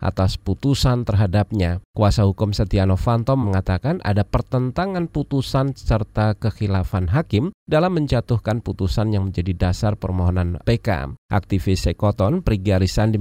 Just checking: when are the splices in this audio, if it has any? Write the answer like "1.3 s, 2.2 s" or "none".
3.4 s, 11.2 s